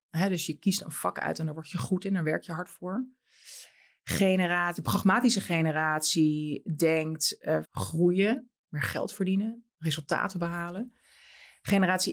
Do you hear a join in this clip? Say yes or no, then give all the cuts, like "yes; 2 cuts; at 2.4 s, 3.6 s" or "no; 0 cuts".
yes; 1 cut; at 7.6 s